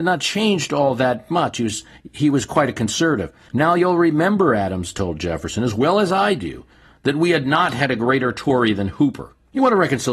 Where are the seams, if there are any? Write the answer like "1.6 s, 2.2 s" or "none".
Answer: none